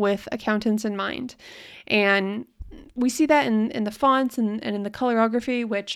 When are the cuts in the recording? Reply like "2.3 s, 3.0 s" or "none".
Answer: none